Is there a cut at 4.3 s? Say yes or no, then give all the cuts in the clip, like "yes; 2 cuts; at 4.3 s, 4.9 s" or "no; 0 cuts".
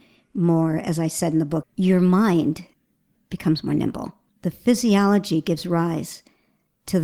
yes; 2 cuts; at 1.6 s, 4.3 s